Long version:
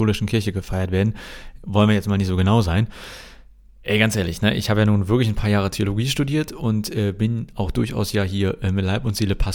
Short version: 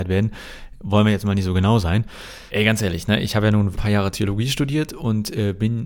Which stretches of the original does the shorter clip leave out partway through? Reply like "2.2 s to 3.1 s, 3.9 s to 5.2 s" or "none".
3.3 s to 3.8 s, 5.1 s to 5.3 s